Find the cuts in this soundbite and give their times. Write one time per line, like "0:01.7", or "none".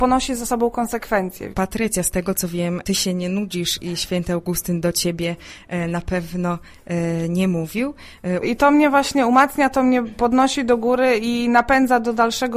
0:01.5
0:08.4

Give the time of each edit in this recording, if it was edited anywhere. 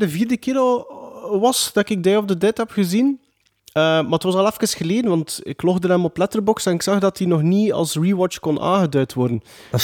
none

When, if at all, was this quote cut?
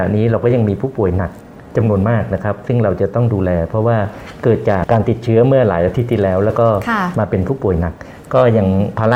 0:04.8

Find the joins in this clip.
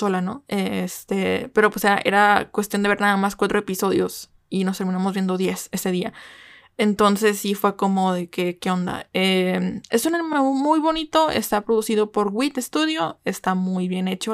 none

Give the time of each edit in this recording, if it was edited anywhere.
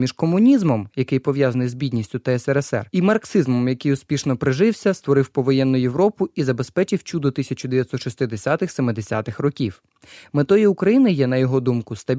none

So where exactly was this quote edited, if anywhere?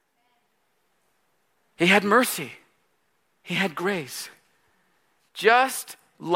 0:05.2

